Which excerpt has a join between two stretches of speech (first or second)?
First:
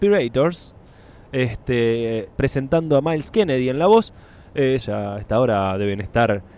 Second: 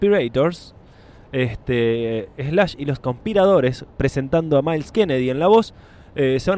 first